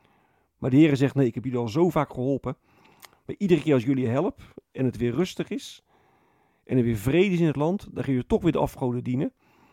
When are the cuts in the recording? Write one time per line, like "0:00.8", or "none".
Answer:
none